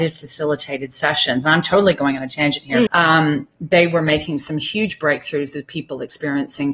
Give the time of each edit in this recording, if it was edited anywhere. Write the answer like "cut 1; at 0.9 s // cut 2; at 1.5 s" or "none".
cut 1; at 2.9 s

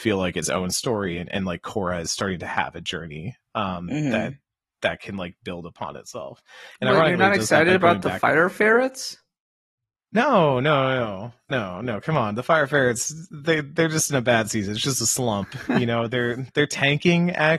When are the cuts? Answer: none

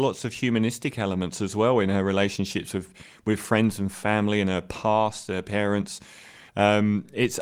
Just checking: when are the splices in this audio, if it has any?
cut 1; at 6.5 s

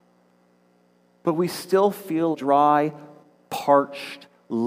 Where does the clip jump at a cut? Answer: cut 1; at 2.3 s

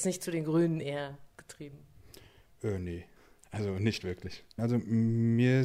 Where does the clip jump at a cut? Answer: none

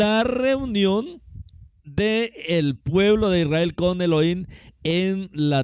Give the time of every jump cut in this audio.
none

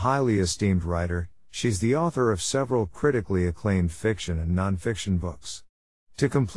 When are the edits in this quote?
none

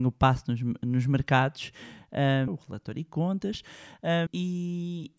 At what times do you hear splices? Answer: cut 1; at 2.5 s // cut 2; at 4.3 s

